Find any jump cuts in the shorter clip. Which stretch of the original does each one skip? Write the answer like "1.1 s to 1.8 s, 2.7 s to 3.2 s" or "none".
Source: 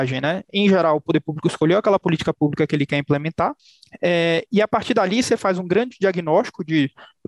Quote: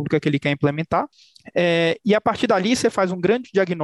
none